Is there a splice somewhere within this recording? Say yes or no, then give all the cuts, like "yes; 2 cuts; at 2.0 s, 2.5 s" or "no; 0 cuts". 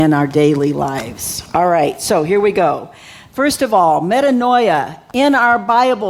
no; 0 cuts